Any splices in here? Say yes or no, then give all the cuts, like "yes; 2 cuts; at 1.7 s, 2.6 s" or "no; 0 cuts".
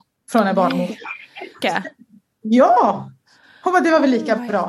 yes; 1 cut; at 1.6 s